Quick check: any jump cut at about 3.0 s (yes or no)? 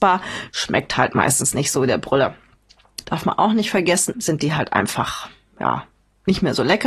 yes